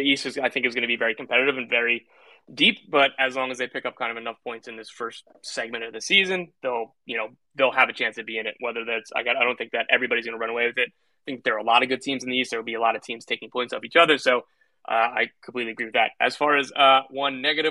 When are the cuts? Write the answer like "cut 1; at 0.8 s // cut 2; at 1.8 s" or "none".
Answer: none